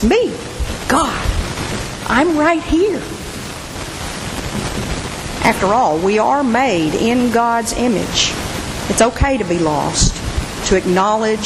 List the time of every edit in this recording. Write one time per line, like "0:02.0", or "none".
0:05.4
0:08.8